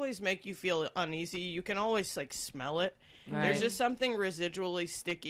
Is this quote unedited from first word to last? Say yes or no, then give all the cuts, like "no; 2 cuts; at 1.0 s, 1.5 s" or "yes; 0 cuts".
yes; 0 cuts